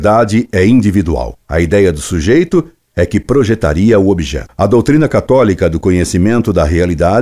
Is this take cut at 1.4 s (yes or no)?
yes